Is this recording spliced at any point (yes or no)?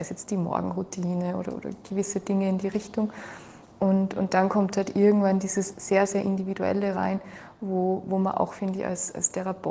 no